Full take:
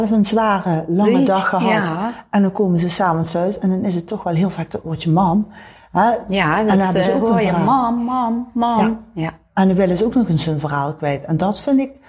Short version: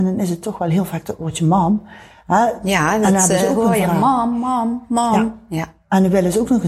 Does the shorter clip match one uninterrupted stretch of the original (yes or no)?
yes